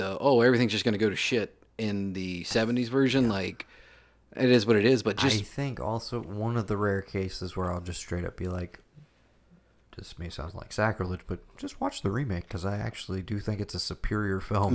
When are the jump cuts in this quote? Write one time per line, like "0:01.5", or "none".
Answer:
none